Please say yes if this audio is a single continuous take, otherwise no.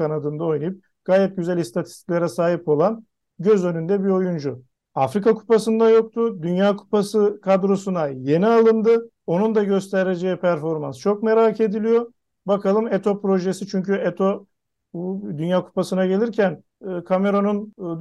yes